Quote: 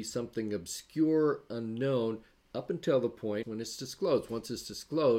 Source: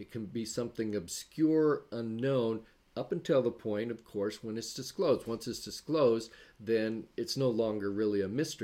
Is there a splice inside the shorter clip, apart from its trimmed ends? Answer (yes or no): yes